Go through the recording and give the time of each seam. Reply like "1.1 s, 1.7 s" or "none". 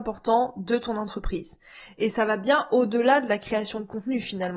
none